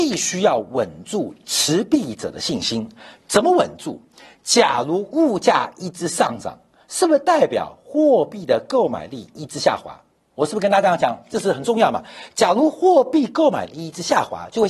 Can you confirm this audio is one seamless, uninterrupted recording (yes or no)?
yes